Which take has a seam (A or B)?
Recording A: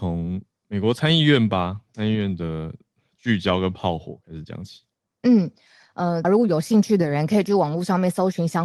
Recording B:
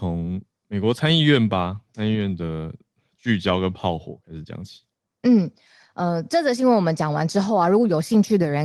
A